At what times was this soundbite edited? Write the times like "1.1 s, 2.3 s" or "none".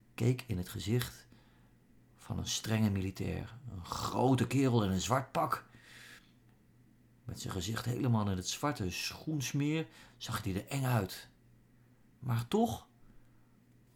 none